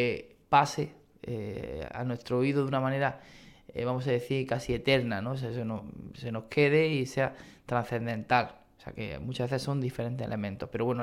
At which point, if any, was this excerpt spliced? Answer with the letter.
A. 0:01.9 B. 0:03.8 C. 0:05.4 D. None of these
A